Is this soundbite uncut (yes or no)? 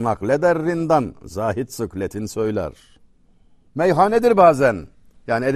no